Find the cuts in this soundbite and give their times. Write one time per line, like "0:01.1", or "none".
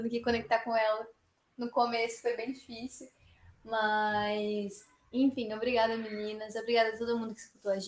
none